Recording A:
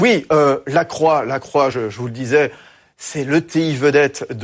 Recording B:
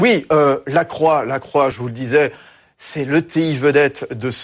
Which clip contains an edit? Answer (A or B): B